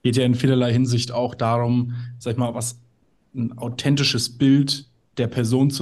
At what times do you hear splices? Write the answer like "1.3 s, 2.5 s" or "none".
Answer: none